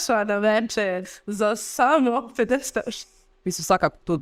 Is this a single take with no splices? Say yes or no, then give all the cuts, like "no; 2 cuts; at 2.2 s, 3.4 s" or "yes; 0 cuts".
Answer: no; 1 cut; at 3.3 s